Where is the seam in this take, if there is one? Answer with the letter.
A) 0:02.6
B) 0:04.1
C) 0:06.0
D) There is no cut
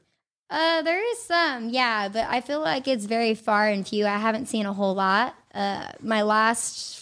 D